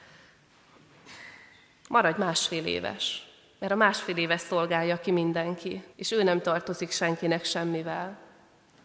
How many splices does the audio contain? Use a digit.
1